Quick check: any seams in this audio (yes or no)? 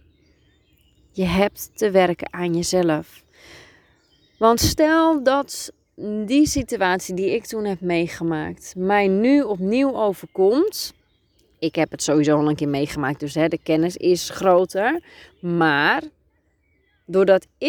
no